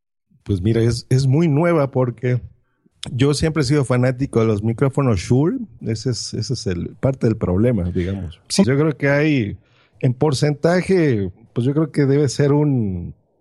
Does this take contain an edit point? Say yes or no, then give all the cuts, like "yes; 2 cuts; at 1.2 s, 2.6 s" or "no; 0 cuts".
yes; 2 cuts; at 5.8 s, 8.6 s